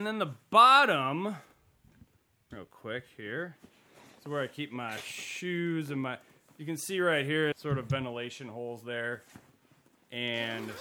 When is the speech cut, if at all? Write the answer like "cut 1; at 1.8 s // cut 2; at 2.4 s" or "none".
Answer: cut 1; at 7.5 s